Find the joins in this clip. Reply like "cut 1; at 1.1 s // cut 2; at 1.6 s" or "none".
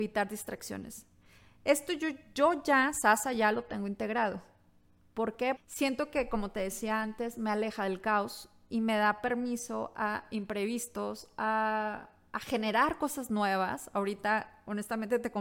cut 1; at 5.6 s